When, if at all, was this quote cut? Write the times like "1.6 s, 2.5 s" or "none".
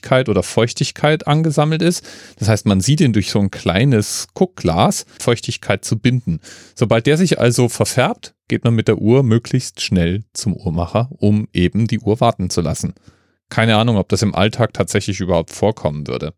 5.2 s